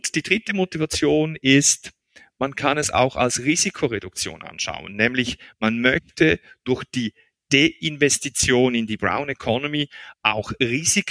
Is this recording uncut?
yes; 0 cuts

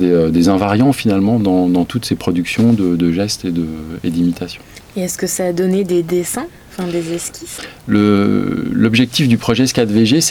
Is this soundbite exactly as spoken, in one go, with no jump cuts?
yes; 0 cuts

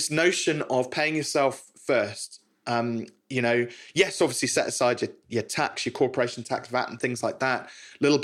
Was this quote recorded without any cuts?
yes; 0 cuts

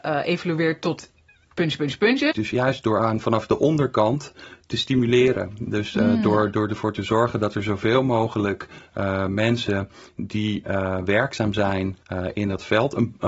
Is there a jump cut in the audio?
yes; 2 cuts; at 2.3 s, 12.0 s

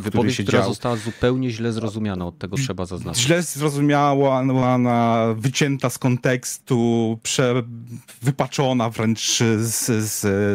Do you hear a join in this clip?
no; 0 cuts

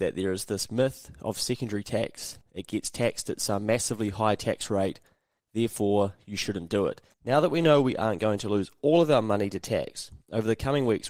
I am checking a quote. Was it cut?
yes; 2 cuts; at 2.4 s, 7.1 s

